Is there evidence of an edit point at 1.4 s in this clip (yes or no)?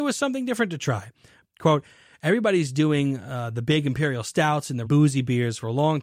yes